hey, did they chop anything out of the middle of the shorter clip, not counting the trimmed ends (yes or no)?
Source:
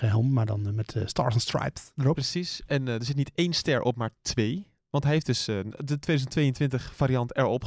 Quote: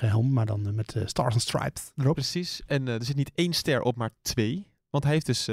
no